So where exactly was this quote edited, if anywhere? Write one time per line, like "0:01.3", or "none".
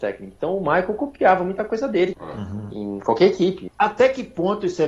0:02.1
0:03.7